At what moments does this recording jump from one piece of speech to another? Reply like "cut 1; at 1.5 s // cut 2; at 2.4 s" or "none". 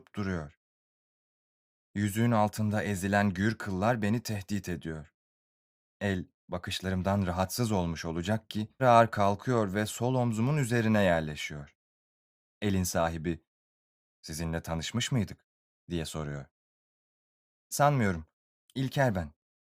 cut 1; at 8.8 s